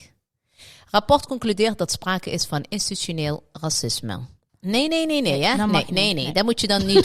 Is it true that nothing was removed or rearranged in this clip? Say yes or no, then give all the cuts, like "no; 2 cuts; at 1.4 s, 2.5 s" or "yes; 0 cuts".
no; 1 cut; at 4.5 s